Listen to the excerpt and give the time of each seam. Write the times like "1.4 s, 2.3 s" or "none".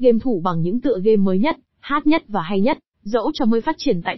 2.9 s